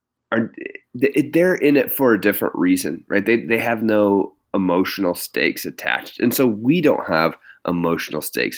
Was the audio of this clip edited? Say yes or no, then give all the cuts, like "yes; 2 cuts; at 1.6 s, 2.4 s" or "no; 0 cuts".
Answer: no; 0 cuts